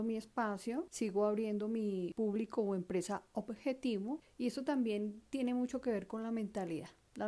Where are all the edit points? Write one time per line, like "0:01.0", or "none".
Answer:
0:04.2